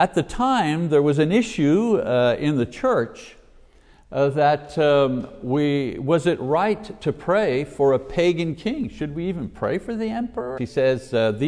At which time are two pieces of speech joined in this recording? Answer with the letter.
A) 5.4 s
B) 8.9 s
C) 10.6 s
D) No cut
C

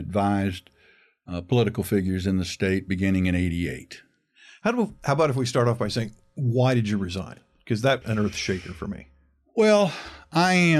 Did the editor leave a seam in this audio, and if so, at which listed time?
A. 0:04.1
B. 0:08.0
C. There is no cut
B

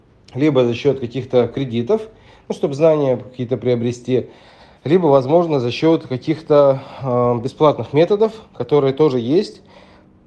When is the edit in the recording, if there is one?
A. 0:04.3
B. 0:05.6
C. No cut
C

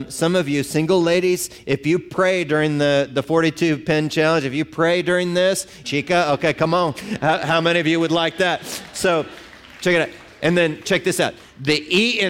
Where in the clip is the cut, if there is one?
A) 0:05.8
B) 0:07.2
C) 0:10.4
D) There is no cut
A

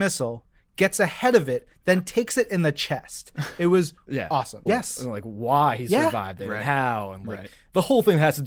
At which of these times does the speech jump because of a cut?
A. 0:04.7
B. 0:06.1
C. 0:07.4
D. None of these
A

